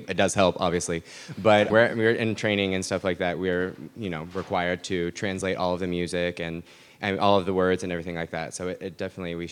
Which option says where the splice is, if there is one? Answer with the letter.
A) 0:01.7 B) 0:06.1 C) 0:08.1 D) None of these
A